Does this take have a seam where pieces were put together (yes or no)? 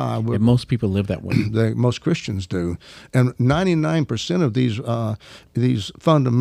no